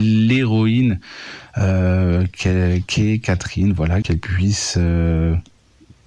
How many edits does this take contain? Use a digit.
1